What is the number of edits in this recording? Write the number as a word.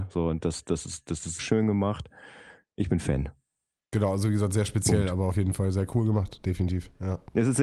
one